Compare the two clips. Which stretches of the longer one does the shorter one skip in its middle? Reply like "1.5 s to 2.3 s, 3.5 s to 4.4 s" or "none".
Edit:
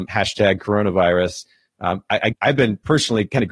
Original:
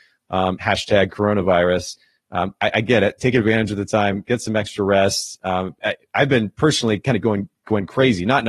2.8 s to 6.0 s